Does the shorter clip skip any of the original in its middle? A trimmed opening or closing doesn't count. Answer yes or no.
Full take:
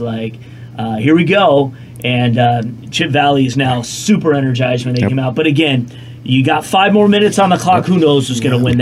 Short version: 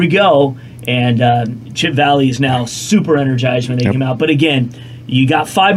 no